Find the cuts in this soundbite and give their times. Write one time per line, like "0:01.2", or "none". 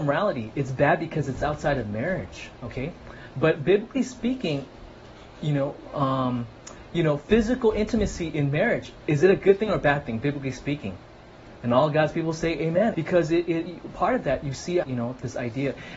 0:12.9
0:14.8